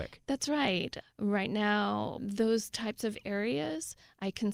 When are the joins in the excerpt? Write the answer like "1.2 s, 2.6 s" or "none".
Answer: 1.0 s, 2.2 s